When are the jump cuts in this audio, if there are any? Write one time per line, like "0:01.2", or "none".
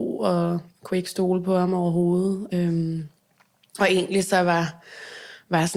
none